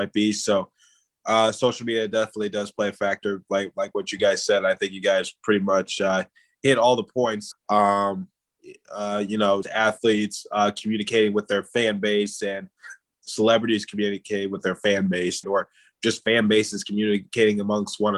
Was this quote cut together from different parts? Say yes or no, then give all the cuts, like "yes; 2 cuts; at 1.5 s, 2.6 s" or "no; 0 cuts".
yes; 3 cuts; at 7.5 s, 9.6 s, 15.4 s